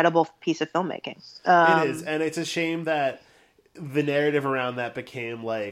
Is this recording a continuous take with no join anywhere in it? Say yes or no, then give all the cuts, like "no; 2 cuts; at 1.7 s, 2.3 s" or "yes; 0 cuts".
yes; 0 cuts